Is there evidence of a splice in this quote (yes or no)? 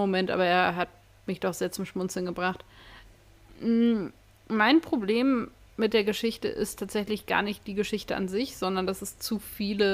no